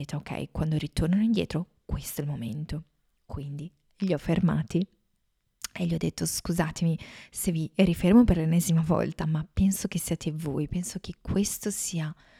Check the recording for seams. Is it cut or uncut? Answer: uncut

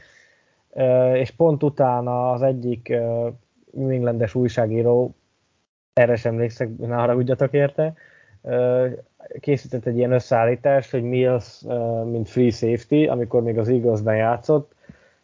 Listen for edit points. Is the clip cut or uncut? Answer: uncut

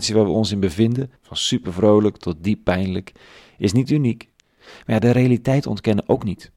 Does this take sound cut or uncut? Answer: cut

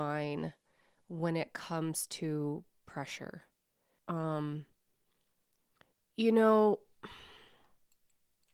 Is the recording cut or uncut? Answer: cut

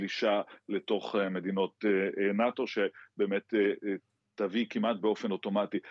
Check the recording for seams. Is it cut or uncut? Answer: uncut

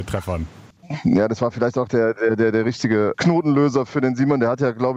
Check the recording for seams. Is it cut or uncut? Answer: uncut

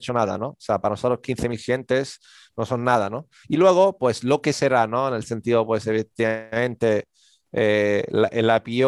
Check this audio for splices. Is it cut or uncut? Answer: cut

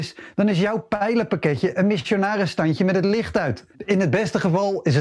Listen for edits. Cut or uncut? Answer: cut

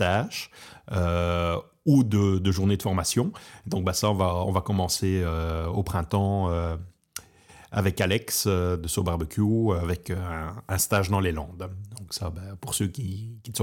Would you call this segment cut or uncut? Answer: uncut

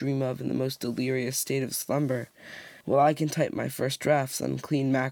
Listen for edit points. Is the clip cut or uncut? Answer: cut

